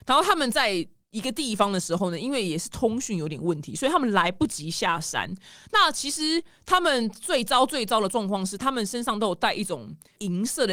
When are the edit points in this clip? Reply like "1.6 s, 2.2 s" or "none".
none